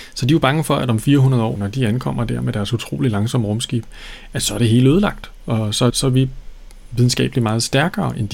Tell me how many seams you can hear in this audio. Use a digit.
2